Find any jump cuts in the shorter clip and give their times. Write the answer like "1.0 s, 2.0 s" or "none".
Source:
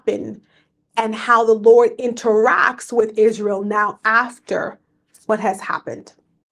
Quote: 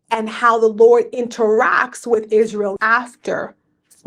2.8 s